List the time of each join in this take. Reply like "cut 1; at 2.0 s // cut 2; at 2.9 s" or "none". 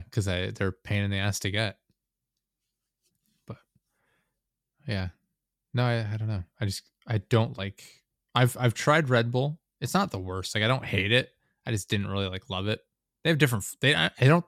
none